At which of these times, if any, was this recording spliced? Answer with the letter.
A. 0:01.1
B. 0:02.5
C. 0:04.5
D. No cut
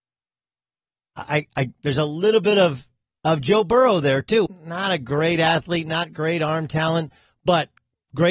C